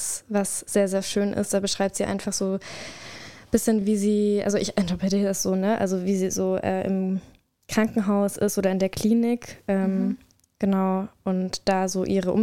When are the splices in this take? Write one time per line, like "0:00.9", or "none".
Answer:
none